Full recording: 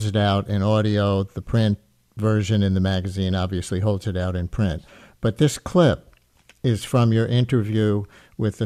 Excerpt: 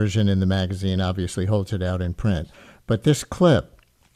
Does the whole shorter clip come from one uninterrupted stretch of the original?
yes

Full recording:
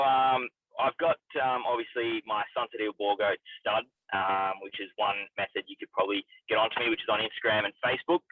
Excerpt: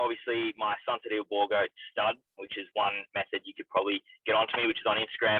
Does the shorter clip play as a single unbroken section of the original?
no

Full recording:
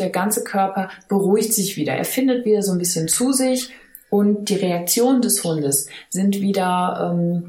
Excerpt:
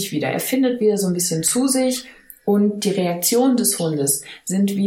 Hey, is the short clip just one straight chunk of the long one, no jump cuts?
yes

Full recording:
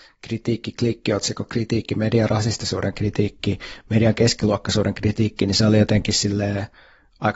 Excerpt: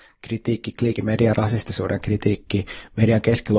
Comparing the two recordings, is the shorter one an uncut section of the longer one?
no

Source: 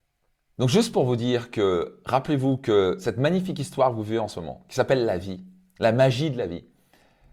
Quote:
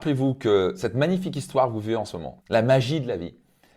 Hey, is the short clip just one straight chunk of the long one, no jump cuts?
no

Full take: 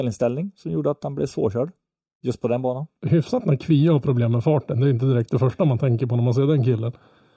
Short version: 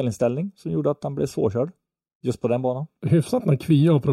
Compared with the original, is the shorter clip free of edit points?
yes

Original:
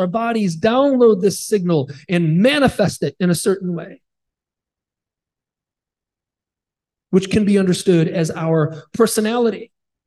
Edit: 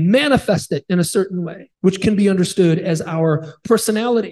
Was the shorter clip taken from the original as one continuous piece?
no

